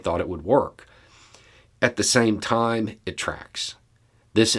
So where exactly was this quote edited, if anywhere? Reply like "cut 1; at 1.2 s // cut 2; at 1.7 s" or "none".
none